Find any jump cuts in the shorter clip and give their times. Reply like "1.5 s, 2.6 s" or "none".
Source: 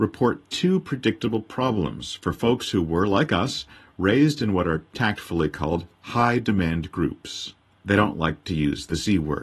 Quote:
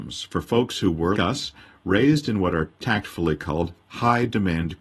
1.1 s

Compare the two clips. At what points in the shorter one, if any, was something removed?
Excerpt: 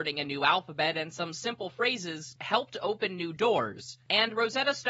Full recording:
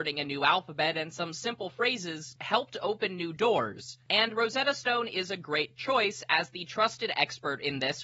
none

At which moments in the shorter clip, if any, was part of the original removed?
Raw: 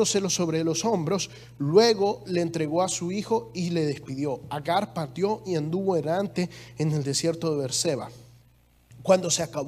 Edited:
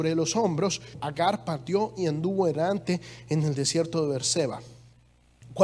0.9 s

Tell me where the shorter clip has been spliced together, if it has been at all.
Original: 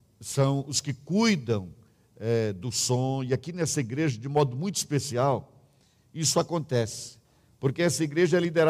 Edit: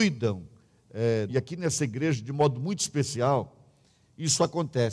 1.3 s

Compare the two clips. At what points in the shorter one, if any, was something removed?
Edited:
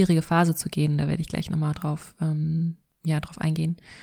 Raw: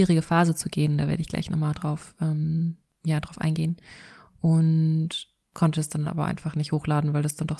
none

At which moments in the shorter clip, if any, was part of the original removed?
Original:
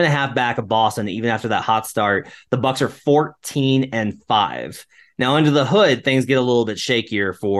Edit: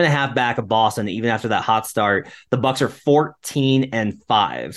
none

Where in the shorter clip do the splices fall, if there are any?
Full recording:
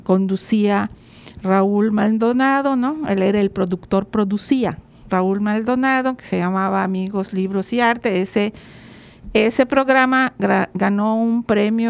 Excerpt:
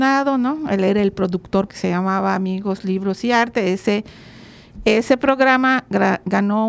1.7 s

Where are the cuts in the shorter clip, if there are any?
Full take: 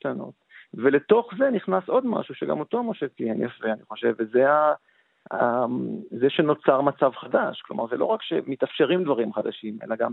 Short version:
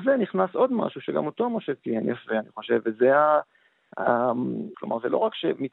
4.7 s

